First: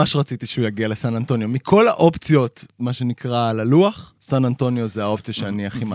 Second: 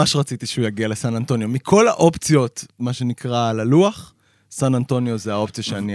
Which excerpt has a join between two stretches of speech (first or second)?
first